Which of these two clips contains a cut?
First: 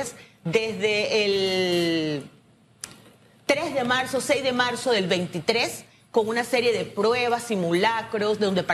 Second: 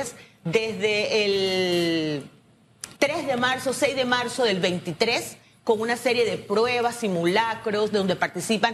second; 1 cut; at 3.0 s

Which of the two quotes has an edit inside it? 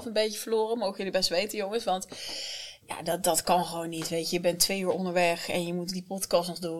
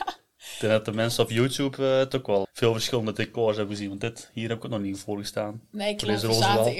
second; 1 cut; at 2.4 s

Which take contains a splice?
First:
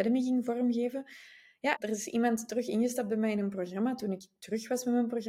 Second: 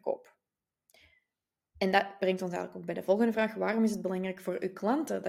first; 1 cut; at 1.8 s

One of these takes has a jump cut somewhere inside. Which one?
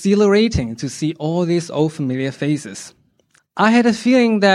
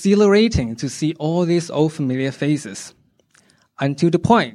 first; 1 cut; at 3.4 s

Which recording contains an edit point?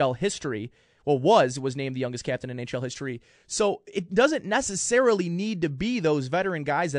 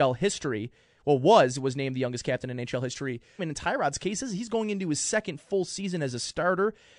second; 1 cut; at 3.4 s

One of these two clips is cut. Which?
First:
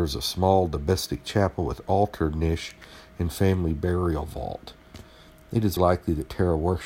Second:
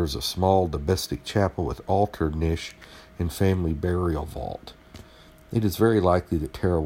first; 1 cut; at 5.8 s

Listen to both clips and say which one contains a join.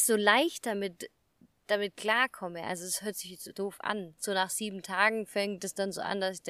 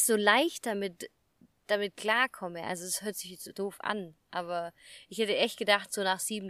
first; 1 cut; at 4.2 s

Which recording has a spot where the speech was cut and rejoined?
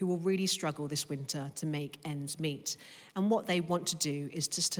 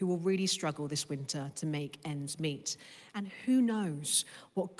second; 1 cut; at 3.1 s

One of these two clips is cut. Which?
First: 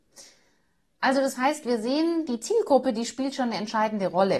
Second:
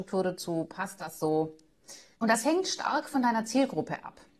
second; 1 cut; at 2.1 s

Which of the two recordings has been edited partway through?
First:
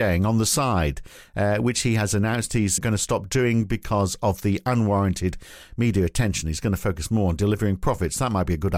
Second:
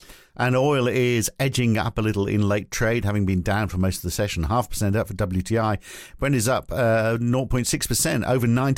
first; 1 cut; at 2.8 s

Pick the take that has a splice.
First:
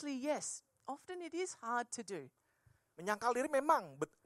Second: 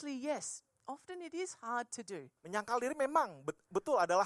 second; 1 cut; at 2.4 s

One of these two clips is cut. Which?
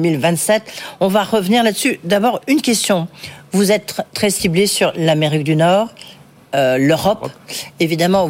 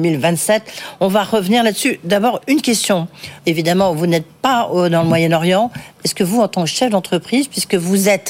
second; 2 cuts; at 3.4 s, 6.0 s

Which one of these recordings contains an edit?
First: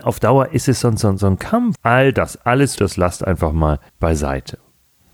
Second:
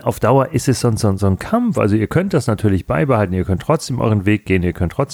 first; 3 cuts; at 1.7 s, 2.8 s, 3.9 s

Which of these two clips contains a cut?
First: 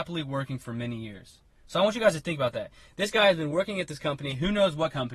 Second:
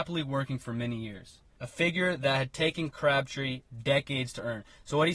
second; 1 cut; at 1.6 s

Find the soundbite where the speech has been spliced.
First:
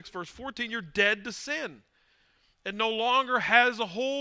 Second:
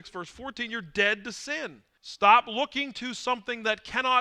second; 1 cut; at 2.0 s

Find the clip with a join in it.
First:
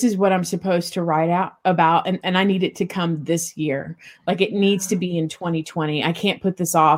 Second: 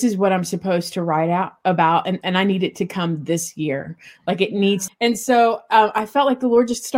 second; 1 cut; at 4.9 s

